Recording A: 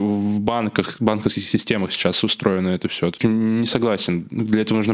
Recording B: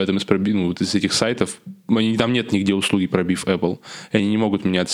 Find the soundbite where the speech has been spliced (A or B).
A